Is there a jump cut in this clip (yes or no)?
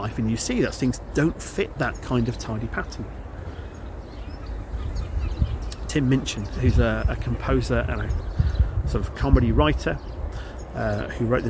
no